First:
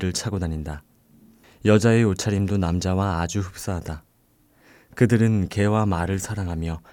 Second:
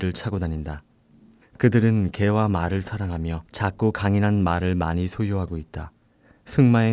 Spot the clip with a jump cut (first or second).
second